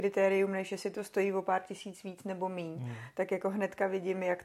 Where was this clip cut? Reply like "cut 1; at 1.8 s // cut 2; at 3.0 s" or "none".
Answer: none